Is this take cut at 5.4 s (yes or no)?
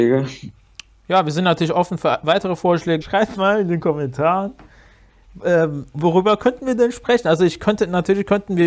no